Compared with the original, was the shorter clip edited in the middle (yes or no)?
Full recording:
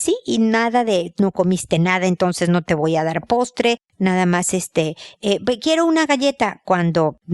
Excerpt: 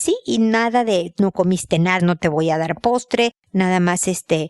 yes